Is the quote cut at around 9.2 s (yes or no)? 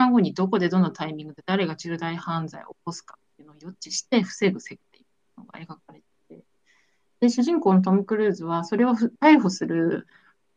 yes